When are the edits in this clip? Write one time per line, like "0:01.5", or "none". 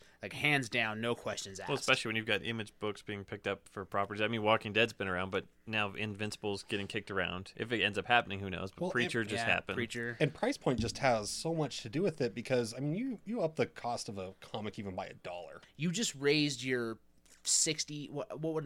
0:15.6